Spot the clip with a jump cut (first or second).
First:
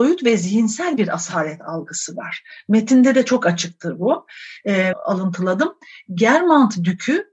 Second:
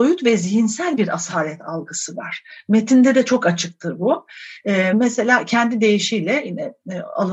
first